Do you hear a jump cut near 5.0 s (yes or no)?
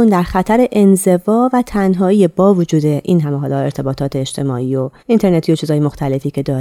yes